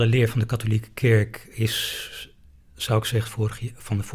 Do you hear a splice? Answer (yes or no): yes